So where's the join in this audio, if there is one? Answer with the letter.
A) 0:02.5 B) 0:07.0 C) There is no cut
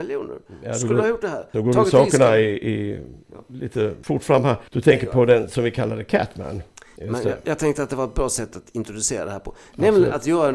B